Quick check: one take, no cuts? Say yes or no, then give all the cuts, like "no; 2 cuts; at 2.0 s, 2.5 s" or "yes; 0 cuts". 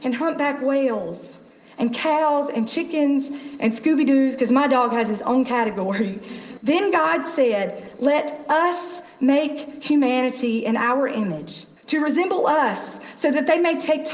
no; 2 cuts; at 6.6 s, 11.8 s